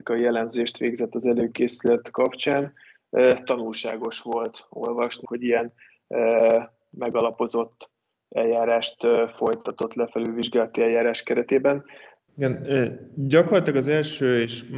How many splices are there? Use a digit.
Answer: 2